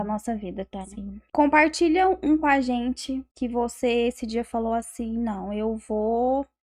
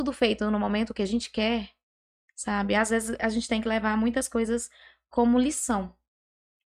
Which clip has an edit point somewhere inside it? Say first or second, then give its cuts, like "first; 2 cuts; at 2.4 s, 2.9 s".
first; 2 cuts; at 1.3 s, 3.3 s